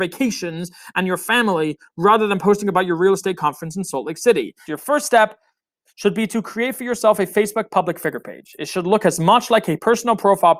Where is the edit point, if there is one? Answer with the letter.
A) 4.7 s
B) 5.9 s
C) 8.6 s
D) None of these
A